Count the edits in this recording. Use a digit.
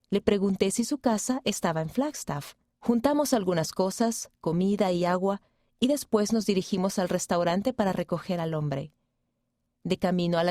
1